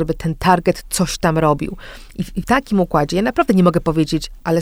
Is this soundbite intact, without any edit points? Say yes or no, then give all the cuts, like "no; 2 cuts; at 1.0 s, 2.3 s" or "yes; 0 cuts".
no; 1 cut; at 2.4 s